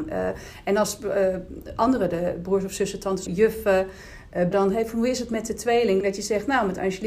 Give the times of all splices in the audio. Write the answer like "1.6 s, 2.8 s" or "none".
3.3 s, 4.5 s, 6.0 s